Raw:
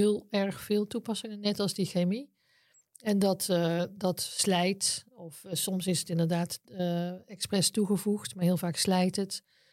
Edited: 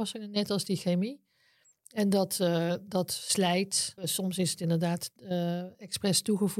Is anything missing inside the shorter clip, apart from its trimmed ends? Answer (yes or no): yes